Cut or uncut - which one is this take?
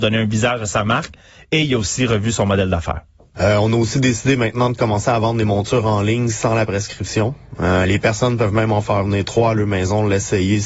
uncut